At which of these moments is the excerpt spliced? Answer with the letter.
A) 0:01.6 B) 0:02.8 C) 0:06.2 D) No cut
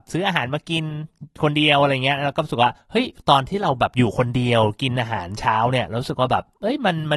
B